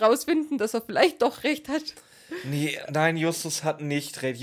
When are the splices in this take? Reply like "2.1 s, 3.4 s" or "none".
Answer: none